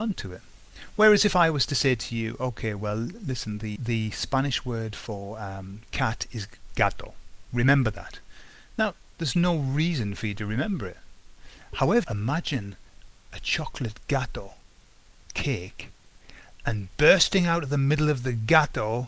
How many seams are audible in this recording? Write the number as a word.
three